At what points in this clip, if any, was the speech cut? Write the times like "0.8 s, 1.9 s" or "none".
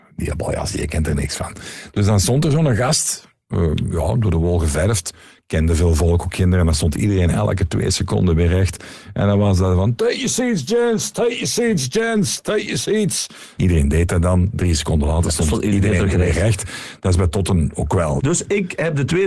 13.6 s, 18.2 s